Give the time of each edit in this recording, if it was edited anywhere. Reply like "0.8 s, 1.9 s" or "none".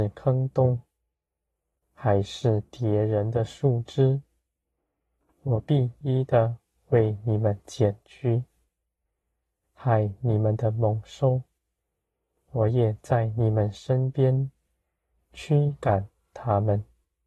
6.0 s